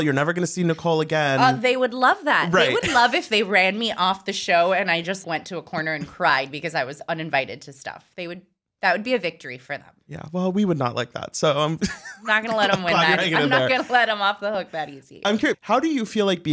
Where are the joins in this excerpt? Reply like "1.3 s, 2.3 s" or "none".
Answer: 5.2 s, 15.5 s